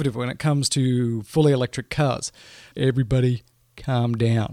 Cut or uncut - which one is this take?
cut